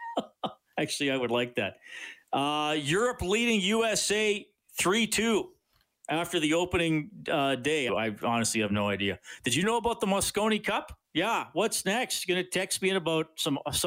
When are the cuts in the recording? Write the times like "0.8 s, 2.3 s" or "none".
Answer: 7.9 s, 11.0 s